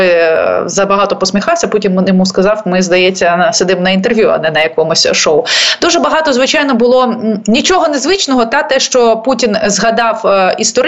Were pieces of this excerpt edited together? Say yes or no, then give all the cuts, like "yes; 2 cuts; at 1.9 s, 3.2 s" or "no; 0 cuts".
no; 0 cuts